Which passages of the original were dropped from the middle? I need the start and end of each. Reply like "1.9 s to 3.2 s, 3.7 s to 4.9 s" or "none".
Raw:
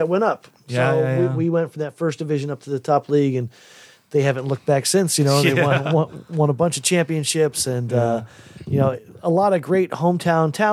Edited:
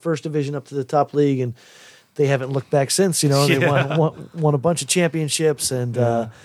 none

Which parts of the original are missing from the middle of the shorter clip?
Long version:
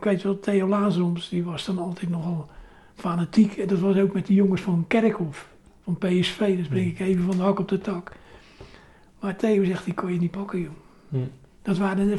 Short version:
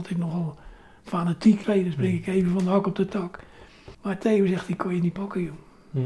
3.6 s to 6.4 s, 8.7 s to 9.1 s

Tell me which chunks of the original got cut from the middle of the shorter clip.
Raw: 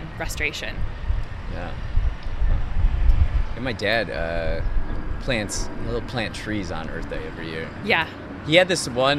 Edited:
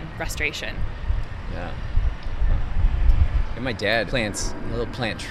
4.1 s to 5.2 s

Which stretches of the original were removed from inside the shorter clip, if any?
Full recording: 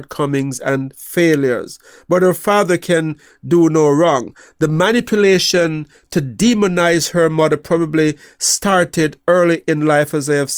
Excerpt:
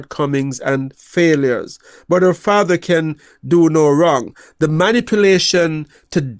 none

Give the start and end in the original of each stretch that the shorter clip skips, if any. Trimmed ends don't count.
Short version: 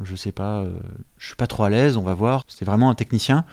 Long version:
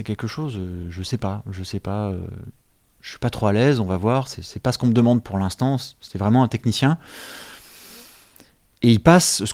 2.6 s to 2.9 s, 4.2 s to 6.0 s

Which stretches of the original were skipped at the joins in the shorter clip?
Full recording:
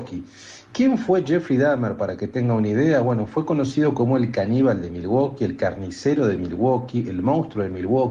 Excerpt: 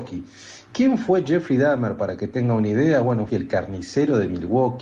3.3 s to 5.4 s

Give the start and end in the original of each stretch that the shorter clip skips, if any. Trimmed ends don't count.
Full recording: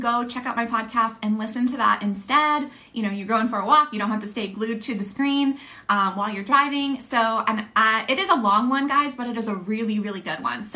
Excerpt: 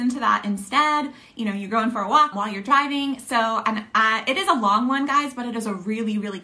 3.9 s to 6.1 s

